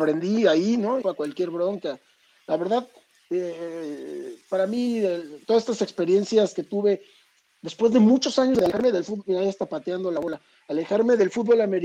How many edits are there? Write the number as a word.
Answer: one